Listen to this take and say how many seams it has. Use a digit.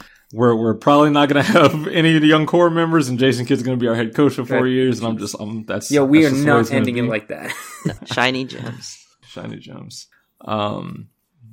2